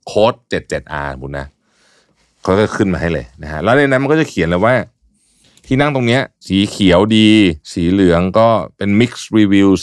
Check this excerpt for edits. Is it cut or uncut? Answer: cut